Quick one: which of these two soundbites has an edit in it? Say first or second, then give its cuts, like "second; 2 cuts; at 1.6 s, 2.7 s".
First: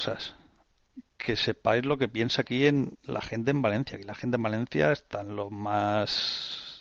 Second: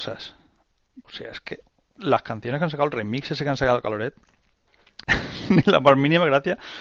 second; 2 cuts; at 1.0 s, 5.0 s